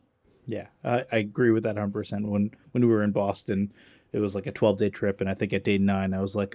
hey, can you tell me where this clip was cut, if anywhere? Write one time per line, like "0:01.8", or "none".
none